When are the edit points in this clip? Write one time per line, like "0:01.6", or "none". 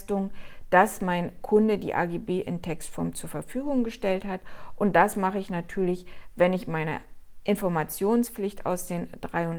none